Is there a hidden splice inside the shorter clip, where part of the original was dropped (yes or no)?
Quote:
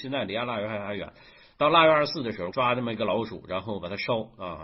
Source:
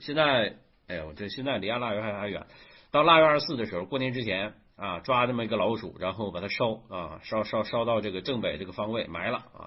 yes